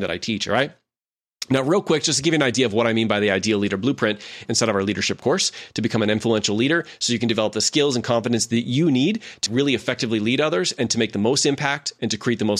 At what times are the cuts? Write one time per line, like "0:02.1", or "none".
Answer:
0:04.5
0:09.5